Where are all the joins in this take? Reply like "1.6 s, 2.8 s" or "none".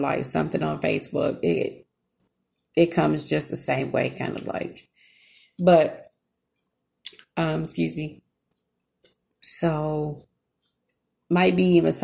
9.4 s